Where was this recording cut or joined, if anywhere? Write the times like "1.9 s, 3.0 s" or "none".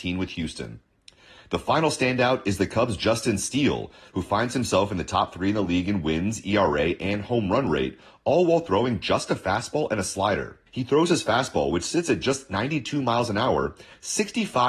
10.7 s